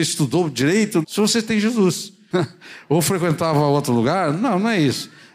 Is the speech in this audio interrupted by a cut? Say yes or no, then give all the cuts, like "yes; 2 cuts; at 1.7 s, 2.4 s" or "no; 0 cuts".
yes; 2 cuts; at 1.0 s, 2.3 s